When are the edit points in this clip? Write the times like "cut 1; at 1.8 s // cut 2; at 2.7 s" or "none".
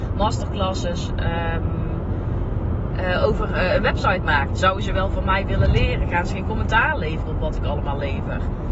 cut 1; at 4.5 s // cut 2; at 6.1 s